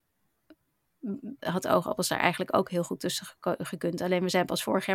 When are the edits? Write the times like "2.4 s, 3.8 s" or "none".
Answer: 1.4 s